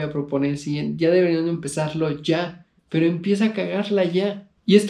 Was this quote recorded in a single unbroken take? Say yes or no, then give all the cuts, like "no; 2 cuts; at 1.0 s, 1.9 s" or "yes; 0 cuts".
no; 1 cut; at 2.8 s